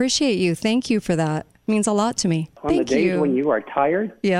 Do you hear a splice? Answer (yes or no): yes